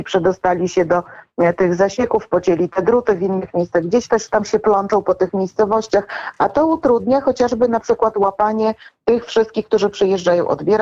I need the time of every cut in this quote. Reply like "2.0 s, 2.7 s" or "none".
none